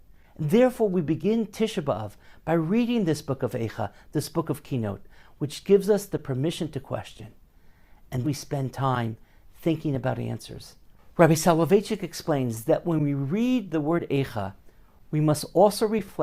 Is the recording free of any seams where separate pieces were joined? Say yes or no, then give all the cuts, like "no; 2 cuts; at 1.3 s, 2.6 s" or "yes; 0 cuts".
no; 1 cut; at 8.2 s